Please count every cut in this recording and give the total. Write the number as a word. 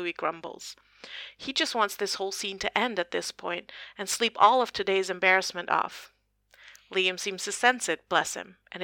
zero